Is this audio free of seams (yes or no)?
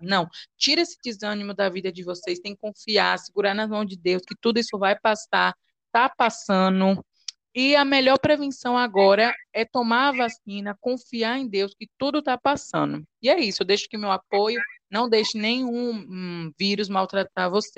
yes